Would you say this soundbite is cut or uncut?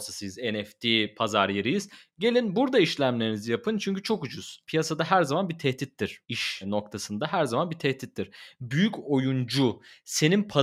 uncut